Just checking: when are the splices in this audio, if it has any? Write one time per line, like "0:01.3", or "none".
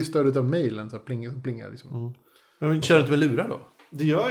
0:02.8

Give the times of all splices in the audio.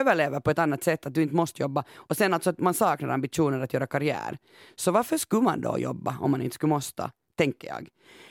none

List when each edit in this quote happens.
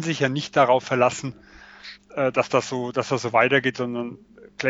none

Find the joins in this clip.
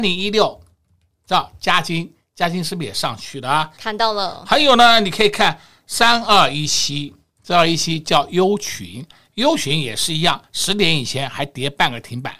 0:03.8

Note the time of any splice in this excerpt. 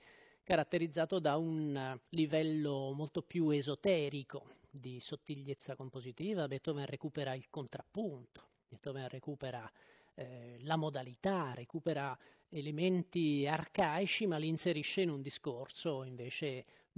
0:02.1

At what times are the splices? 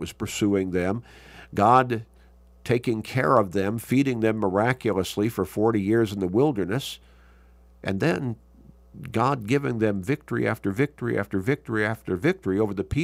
none

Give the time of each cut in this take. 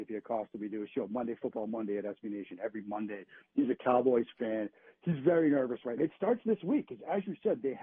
0:06.0

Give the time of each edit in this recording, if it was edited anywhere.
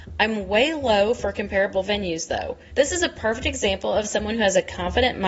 0:02.7

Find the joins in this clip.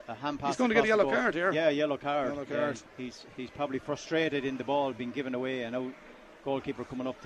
0:02.8

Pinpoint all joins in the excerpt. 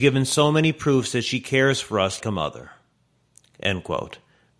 0:02.2

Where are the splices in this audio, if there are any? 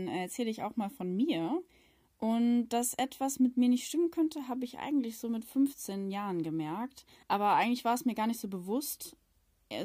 none

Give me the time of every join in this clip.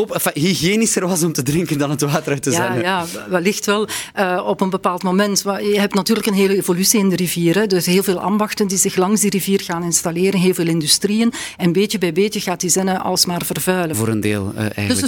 0:13.9

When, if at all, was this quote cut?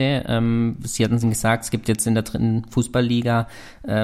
0:01.2

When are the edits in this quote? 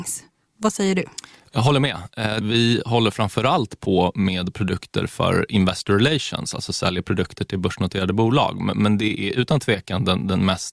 0:02.4

